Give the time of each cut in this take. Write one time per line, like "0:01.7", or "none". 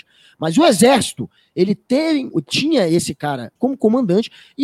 0:02.3
0:03.6